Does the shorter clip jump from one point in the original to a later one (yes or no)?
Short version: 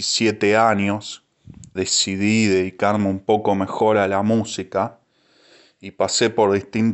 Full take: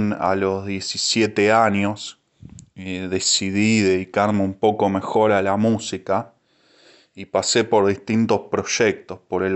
yes